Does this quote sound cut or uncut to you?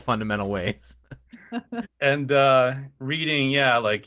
cut